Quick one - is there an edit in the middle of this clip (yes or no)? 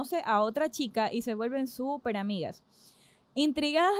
no